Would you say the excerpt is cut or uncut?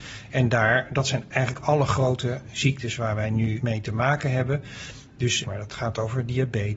cut